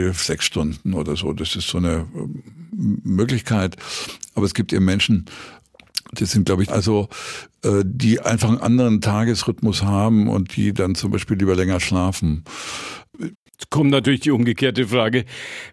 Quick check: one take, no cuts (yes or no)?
no